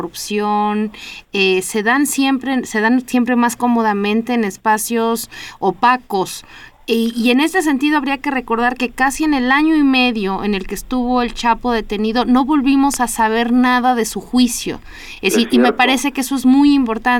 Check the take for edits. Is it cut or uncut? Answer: uncut